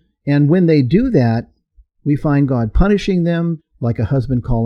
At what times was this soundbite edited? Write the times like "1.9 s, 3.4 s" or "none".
3.6 s